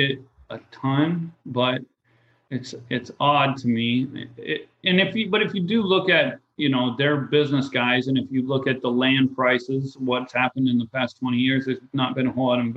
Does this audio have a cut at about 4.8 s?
yes; 1 cut; at 4.8 s

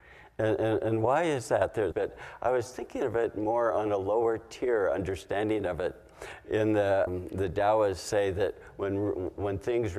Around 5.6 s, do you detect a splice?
no; 2 cuts; at 1.9 s, 7.1 s

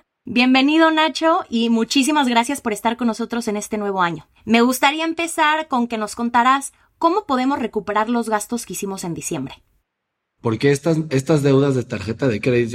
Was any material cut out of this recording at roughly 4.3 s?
no; 1 cut; at 10.4 s

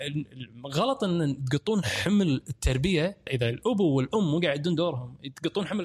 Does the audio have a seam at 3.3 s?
yes; 1 cut; at 3.3 s

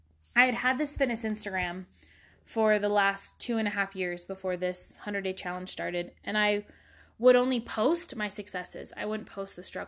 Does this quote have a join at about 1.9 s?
no; 0 cuts

